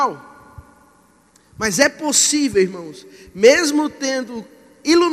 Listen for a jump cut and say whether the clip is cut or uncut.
uncut